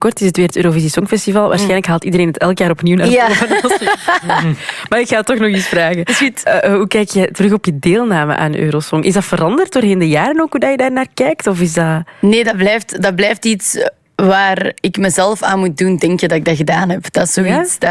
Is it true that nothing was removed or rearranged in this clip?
yes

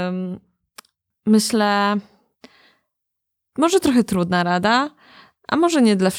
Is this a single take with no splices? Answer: no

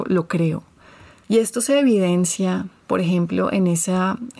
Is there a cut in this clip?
yes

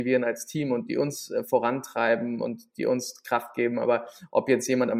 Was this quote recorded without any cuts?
yes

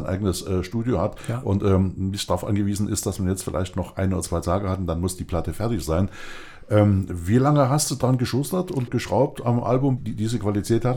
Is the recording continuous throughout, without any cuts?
no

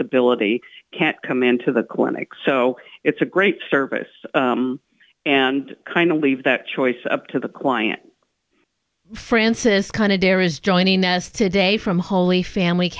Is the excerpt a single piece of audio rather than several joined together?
yes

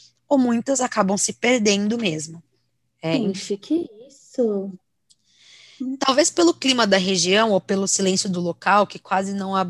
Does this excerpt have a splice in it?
yes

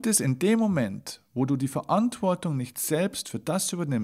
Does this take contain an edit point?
no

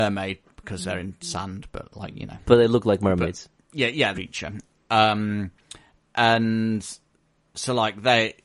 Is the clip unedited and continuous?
no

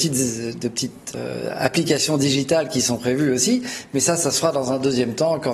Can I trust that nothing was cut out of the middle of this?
yes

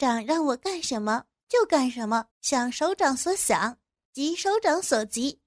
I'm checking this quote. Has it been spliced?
yes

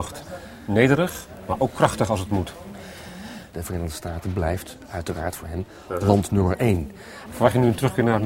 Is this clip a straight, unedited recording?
no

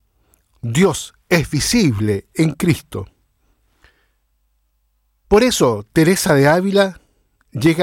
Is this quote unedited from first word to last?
yes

